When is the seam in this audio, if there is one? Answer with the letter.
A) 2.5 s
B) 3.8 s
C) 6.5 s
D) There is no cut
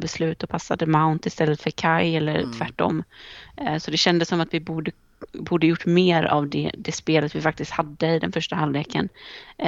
D